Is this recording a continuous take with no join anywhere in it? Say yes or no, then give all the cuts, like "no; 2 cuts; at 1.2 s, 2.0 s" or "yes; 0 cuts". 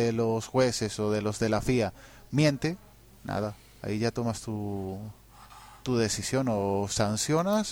yes; 0 cuts